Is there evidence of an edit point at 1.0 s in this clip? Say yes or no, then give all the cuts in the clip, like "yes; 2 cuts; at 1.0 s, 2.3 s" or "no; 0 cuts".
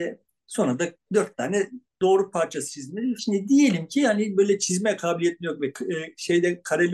yes; 2 cuts; at 1.0 s, 3.2 s